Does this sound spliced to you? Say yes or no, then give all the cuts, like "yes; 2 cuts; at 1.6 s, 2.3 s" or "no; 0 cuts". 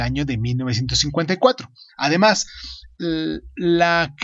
yes; 1 cut; at 1.9 s